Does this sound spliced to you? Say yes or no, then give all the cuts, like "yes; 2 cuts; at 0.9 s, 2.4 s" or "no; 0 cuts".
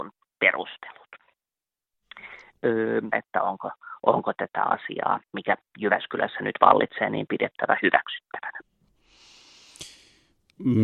yes; 2 cuts; at 3.1 s, 5.2 s